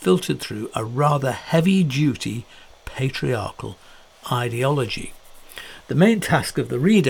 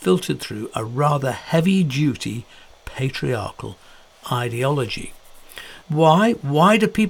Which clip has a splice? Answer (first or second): second